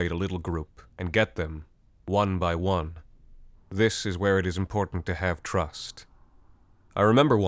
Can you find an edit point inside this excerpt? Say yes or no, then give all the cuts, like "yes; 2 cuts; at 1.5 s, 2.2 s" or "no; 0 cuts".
yes; 1 cut; at 3.5 s